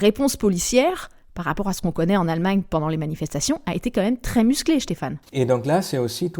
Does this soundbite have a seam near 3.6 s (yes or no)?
no